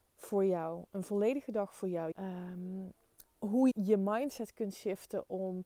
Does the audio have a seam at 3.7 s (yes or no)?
yes